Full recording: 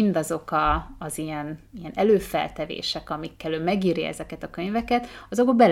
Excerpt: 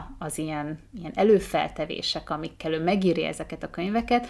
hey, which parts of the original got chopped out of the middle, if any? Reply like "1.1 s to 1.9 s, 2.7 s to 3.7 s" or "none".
none